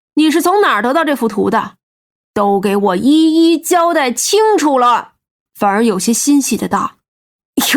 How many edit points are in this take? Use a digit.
1